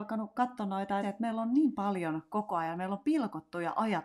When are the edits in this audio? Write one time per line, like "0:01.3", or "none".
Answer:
0:01.0